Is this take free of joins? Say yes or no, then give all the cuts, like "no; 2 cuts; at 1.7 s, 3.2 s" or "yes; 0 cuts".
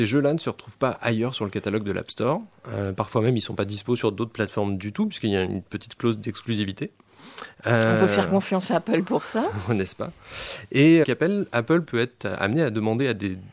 no; 1 cut; at 11.0 s